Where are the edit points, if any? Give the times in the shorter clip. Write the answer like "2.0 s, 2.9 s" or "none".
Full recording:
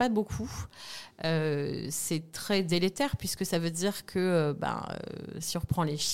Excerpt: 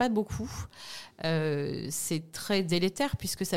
none